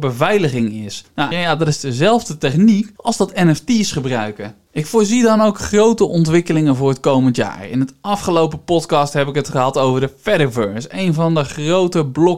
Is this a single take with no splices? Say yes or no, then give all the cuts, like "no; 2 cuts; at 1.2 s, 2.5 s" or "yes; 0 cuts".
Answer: no; 1 cut; at 1.3 s